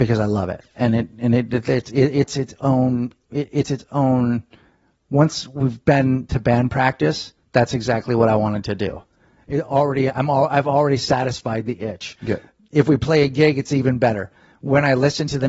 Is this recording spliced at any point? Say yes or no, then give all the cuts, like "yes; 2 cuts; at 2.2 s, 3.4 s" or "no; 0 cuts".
no; 0 cuts